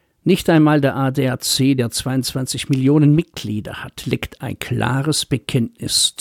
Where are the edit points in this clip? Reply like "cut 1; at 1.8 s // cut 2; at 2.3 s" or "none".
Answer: none